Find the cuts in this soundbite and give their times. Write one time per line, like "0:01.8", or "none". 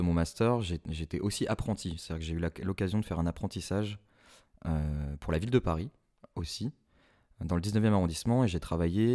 none